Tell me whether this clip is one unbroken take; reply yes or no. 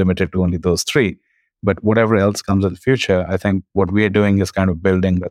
yes